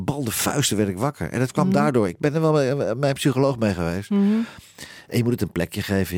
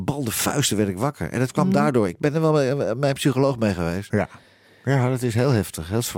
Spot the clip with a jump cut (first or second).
second